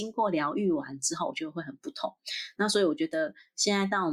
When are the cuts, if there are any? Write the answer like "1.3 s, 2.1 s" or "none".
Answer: none